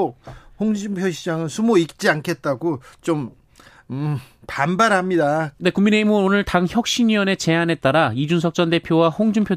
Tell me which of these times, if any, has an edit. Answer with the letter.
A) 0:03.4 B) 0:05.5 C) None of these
B